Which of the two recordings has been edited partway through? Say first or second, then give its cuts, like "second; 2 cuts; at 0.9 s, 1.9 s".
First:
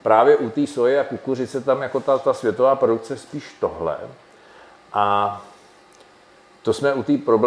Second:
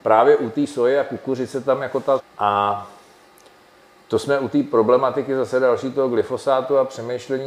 second; 1 cut; at 2.2 s